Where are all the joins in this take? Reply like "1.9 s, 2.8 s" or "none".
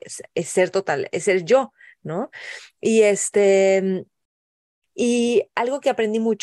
4.8 s